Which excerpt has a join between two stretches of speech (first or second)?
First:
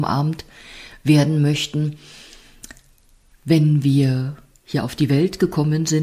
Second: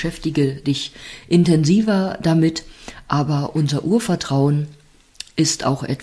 first